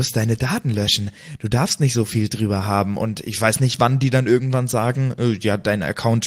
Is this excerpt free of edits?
yes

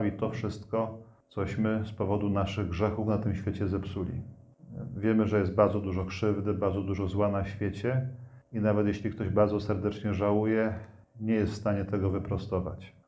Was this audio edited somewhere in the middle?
no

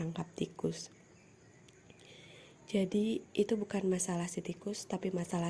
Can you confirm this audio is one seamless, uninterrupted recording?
yes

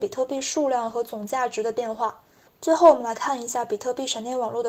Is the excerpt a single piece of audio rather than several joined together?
no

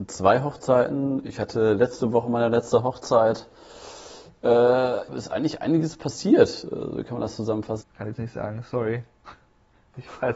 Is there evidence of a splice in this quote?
yes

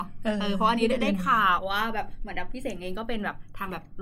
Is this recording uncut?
yes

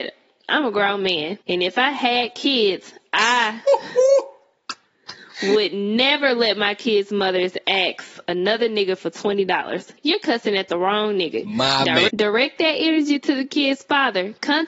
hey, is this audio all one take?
no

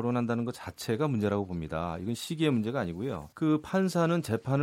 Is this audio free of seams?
no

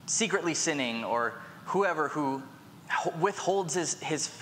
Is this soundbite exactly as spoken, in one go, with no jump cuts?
yes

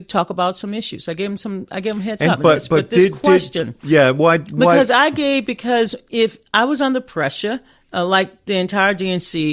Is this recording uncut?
no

